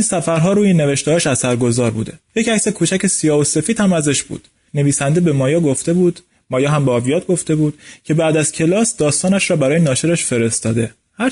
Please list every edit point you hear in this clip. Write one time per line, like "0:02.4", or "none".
0:04.7